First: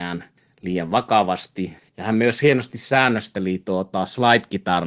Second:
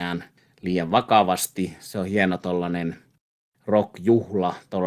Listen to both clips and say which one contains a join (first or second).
first